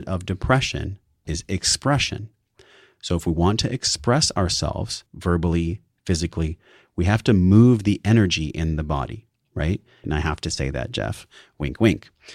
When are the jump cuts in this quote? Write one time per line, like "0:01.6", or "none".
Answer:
0:05.1
0:10.0